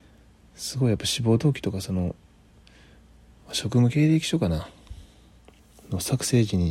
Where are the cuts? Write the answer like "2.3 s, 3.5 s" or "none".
none